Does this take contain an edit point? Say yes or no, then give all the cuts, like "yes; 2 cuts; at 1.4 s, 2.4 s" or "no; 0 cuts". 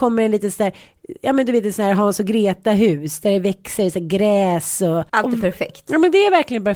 yes; 1 cut; at 5.1 s